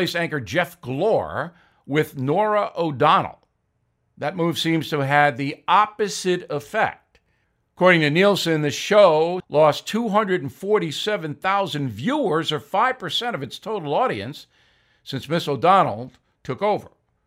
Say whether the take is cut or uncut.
cut